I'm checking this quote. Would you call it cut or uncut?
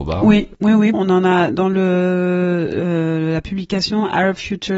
cut